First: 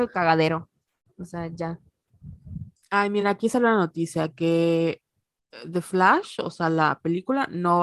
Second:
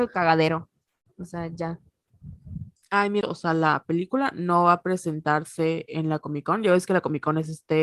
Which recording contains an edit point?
second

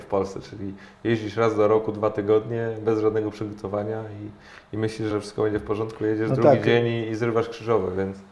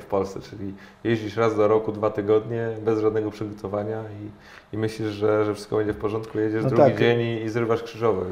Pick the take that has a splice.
first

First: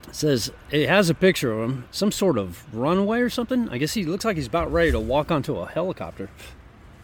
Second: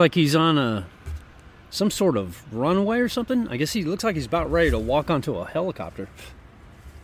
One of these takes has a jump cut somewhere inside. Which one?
first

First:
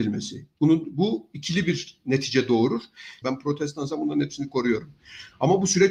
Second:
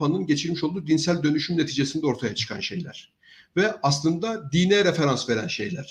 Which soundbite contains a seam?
first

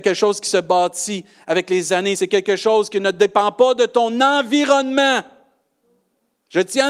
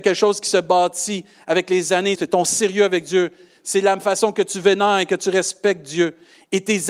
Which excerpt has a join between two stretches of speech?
second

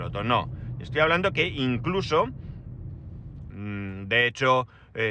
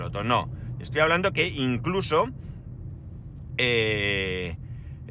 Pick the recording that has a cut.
first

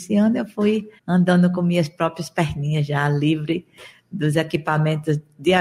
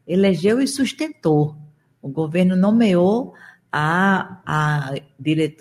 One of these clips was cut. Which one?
first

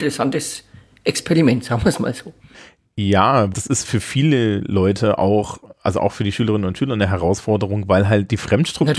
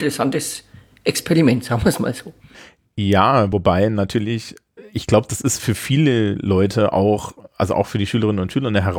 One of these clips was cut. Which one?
first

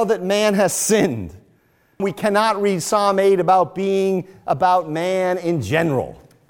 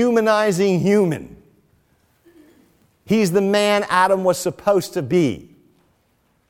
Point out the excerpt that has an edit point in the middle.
first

